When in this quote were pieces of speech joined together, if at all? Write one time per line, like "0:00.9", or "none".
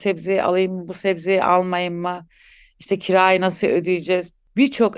none